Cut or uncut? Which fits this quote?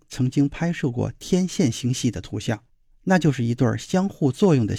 uncut